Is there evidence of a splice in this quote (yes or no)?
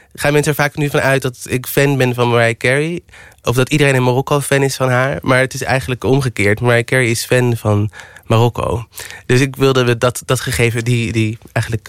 no